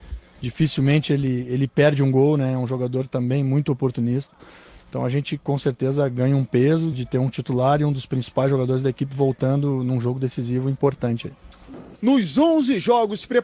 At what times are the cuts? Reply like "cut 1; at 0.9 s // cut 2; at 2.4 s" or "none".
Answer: cut 1; at 6.9 s // cut 2; at 12.0 s